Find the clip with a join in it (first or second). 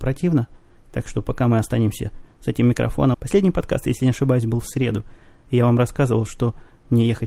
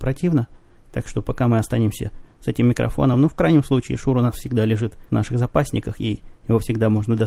first